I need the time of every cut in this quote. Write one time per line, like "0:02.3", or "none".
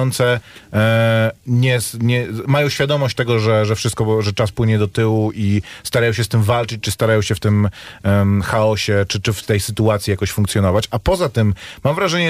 none